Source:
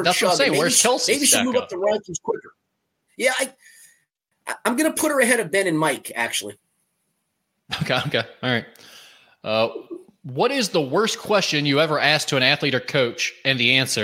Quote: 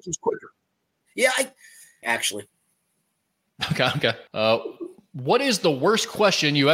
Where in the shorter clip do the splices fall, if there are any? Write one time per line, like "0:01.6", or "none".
0:02.0
0:04.3